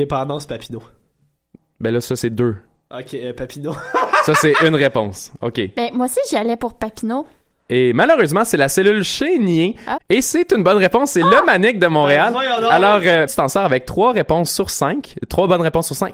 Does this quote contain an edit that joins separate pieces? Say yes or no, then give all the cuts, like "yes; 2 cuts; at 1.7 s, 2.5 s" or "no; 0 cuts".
yes; 2 cuts; at 10.0 s, 13.3 s